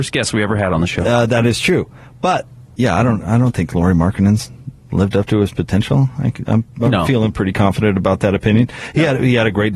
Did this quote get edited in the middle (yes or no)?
no